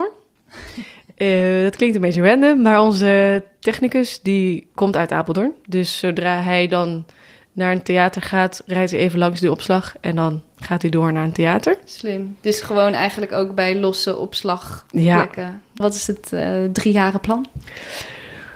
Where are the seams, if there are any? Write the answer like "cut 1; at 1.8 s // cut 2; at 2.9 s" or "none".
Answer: cut 1; at 15.8 s